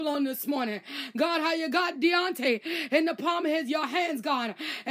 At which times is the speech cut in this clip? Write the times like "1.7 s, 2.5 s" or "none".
none